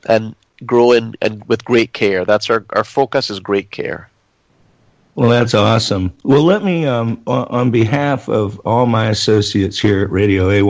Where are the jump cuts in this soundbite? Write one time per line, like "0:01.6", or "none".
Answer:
none